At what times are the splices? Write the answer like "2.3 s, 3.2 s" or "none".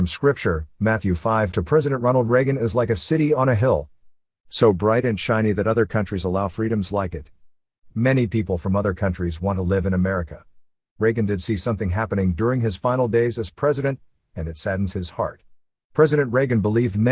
1.5 s